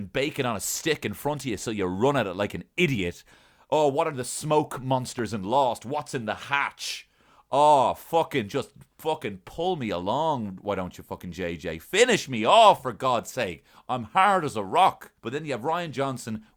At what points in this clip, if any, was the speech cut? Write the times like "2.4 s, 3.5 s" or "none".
15.2 s